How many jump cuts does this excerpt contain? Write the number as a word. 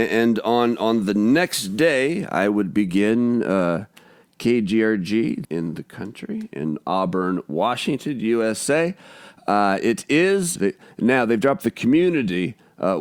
two